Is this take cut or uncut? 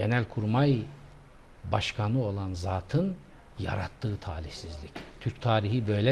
uncut